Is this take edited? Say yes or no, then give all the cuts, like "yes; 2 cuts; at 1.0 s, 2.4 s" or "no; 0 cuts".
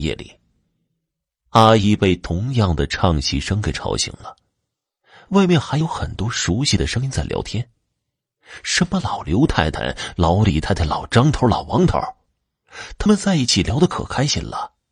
no; 0 cuts